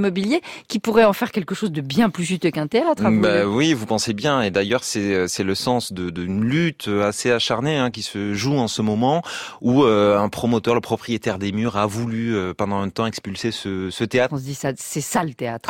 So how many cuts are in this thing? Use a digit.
1